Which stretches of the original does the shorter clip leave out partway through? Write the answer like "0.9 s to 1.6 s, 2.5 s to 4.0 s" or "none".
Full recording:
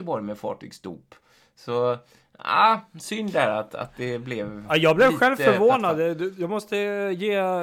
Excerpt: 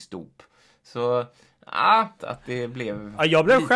2.9 s to 3.7 s